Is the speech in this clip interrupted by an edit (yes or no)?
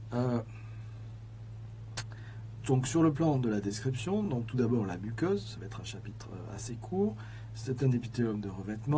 no